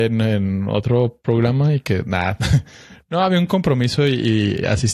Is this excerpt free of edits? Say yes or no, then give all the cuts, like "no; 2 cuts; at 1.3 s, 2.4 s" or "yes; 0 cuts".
yes; 0 cuts